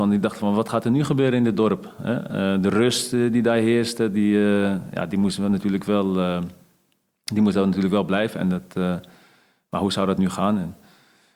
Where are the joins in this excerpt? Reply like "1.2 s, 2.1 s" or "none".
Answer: none